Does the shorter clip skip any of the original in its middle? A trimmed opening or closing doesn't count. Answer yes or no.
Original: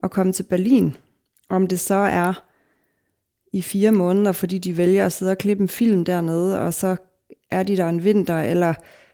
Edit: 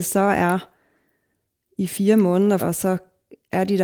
yes